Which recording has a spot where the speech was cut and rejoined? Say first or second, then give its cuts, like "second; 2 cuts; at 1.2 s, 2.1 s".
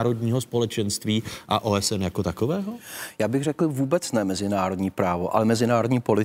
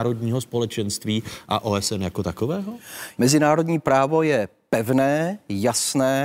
second; 1 cut; at 3.2 s